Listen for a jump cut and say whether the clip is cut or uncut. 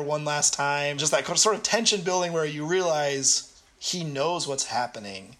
cut